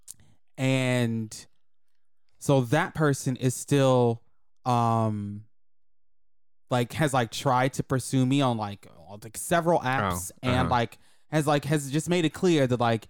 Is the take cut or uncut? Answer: uncut